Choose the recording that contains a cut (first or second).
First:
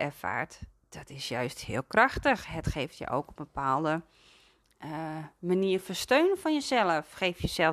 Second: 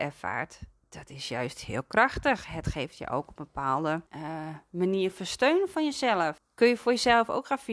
second